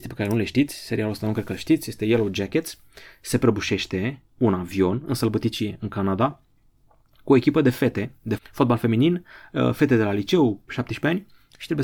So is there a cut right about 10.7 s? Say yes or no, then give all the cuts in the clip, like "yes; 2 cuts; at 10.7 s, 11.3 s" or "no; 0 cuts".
yes; 2 cuts; at 8.4 s, 10.7 s